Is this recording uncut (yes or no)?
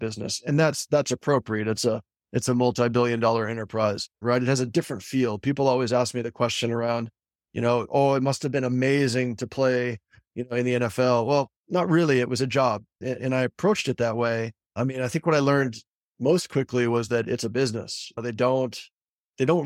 no